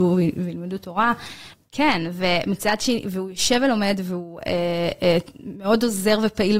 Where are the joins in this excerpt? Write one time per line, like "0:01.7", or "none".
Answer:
0:01.5